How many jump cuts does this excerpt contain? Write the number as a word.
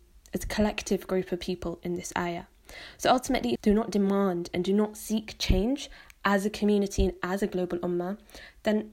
one